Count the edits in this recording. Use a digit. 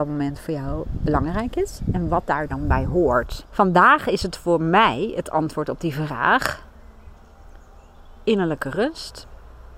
1